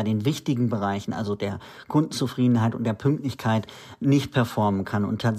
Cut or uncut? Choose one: uncut